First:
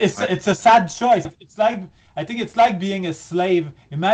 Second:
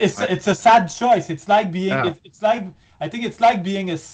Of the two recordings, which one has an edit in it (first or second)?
first